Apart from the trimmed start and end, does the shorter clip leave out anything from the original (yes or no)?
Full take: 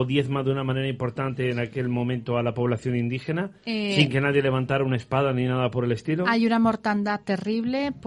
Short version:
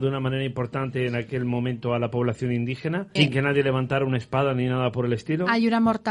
yes